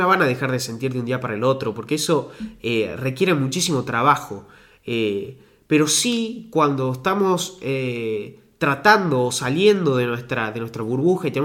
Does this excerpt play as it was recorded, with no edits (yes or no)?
yes